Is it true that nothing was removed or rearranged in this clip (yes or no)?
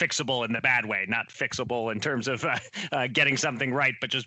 yes